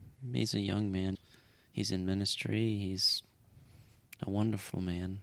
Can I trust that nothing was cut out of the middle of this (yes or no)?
no